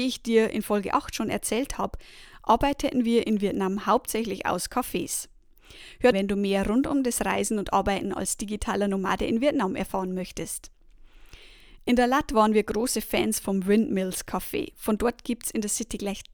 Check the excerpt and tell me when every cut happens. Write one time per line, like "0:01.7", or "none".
0:06.1